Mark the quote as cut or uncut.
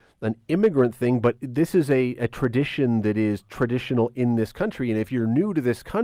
uncut